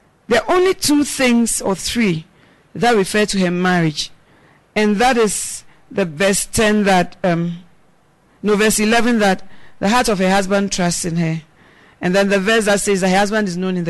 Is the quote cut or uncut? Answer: uncut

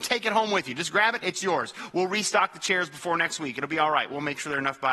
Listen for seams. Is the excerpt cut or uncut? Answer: cut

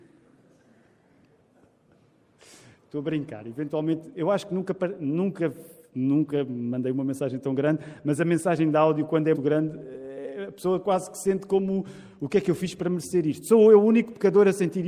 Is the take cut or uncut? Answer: cut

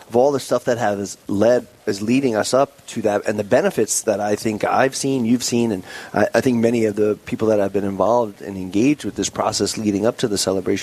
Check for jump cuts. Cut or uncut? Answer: uncut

